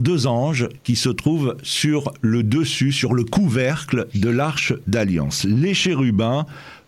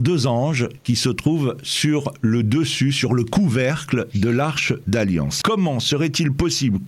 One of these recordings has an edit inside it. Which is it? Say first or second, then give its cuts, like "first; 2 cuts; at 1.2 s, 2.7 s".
second; 1 cut; at 5.4 s